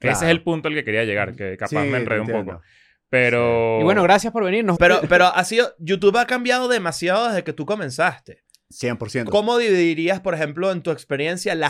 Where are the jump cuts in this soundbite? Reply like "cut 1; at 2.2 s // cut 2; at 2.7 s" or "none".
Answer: cut 1; at 4.8 s // cut 2; at 9.3 s

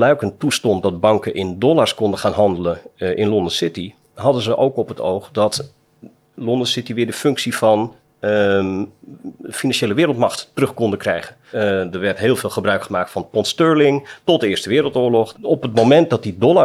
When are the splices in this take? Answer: cut 1; at 11.5 s // cut 2; at 15.3 s

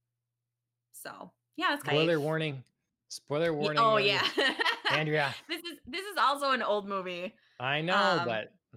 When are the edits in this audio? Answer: cut 1; at 1.9 s

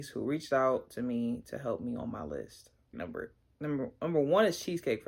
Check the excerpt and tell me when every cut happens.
cut 1; at 2.9 s

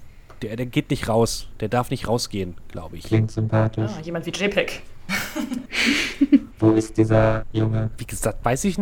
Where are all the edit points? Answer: none

